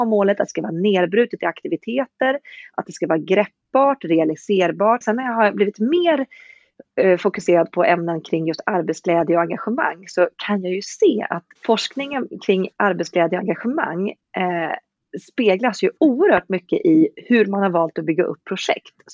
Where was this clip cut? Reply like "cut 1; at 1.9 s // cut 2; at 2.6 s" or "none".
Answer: cut 1; at 5.0 s // cut 2; at 11.6 s